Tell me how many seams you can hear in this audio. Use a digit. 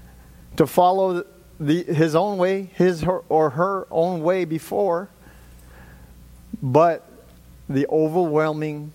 0